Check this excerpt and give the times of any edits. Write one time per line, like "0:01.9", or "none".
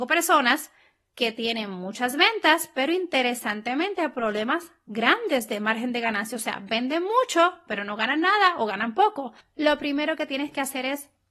none